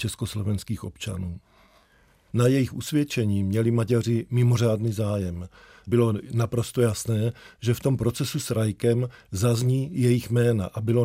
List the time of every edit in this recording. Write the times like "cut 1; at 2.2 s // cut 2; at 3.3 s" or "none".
none